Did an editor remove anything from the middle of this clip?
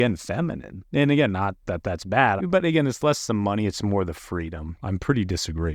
yes; 2 cuts; at 2.4 s, 4.8 s

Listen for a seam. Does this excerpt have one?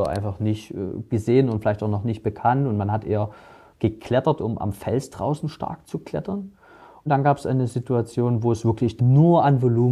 yes; 1 cut; at 9.0 s

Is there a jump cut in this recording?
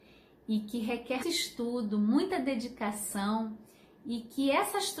yes; 1 cut; at 1.2 s

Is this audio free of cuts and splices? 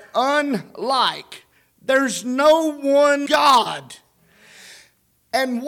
no; 1 cut; at 3.3 s

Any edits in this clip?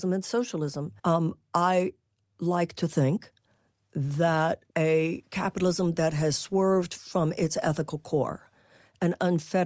yes; 2 cuts; at 1.0 s, 4.7 s

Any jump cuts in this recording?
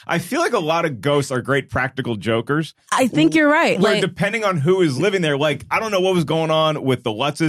no; 0 cuts

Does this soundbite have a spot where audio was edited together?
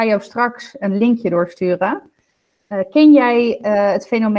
no; 0 cuts

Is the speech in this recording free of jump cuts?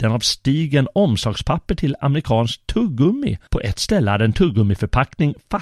no; 1 cut; at 3.5 s

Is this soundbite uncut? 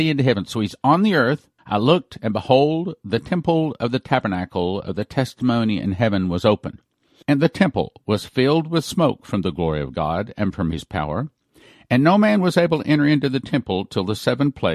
no; 2 cuts; at 1.6 s, 7.2 s

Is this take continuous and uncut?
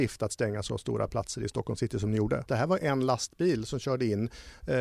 no; 1 cut; at 2.5 s

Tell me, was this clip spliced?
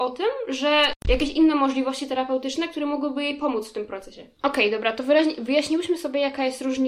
no; 0 cuts

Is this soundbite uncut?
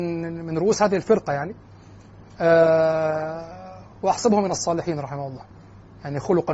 yes; 0 cuts

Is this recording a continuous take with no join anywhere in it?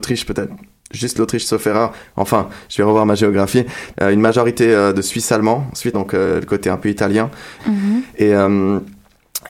no; 3 cuts; at 3.9 s, 5.9 s, 7.6 s

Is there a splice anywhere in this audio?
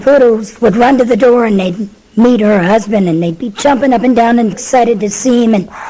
yes; 1 cut; at 4.5 s

